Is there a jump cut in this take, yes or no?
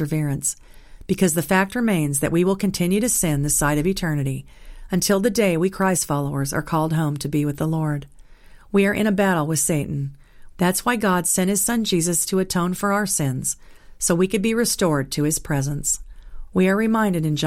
yes